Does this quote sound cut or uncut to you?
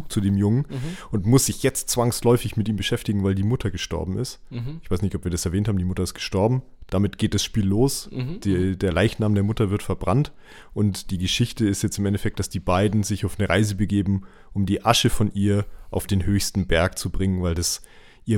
uncut